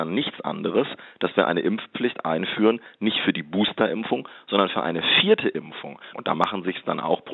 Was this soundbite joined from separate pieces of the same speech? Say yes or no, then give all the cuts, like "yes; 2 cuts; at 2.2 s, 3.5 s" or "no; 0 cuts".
yes; 1 cut; at 6.1 s